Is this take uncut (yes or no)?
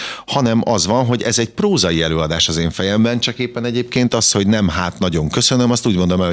yes